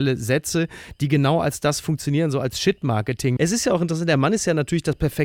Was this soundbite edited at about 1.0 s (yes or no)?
no